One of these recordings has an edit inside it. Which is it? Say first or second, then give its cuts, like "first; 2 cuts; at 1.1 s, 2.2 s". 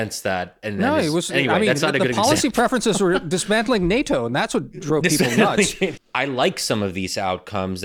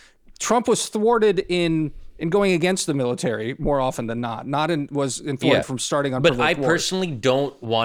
first; 1 cut; at 6.0 s